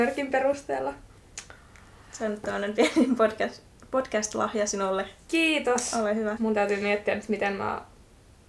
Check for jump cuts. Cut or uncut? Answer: cut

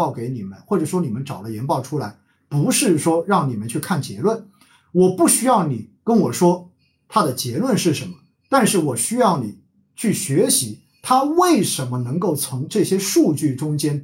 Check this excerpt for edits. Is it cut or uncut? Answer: uncut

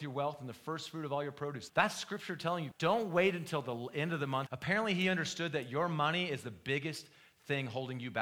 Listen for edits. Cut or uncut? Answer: cut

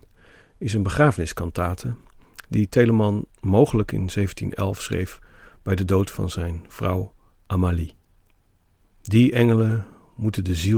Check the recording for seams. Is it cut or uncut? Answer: cut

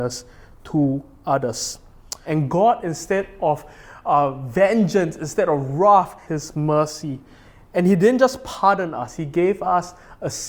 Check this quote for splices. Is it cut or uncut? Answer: cut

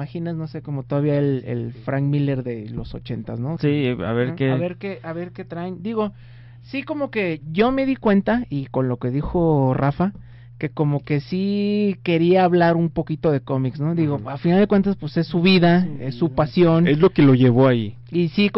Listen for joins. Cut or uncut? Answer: cut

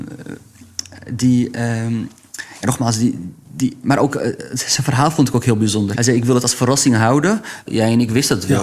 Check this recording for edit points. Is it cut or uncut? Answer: cut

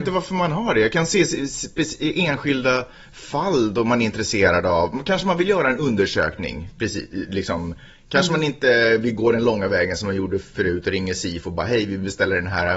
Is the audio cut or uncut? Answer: uncut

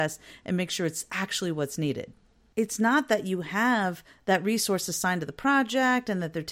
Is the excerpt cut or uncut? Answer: cut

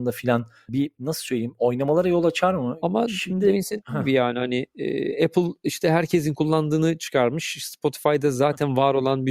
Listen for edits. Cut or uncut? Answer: cut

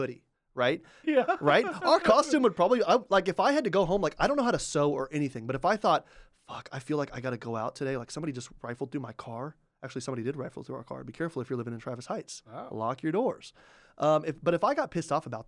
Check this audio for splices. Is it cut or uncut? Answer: cut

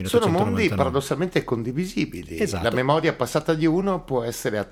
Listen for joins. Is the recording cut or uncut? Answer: uncut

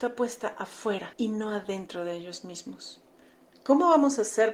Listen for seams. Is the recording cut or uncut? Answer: uncut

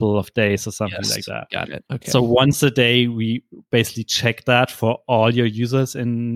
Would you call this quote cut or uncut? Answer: uncut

